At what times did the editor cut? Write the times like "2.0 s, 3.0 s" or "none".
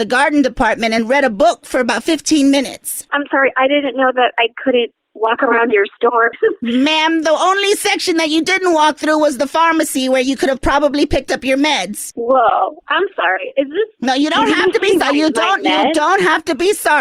none